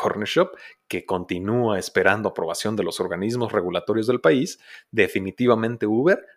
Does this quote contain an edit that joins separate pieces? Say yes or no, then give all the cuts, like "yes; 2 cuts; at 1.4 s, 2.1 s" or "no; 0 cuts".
no; 0 cuts